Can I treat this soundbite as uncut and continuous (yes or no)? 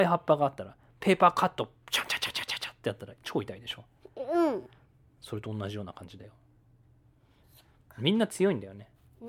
yes